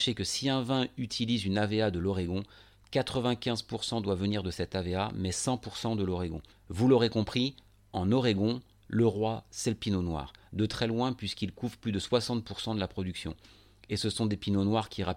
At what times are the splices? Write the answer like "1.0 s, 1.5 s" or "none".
6.5 s